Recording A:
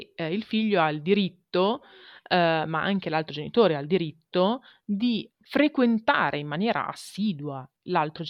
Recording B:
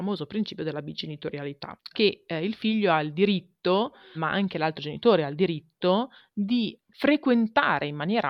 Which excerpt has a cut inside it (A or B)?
B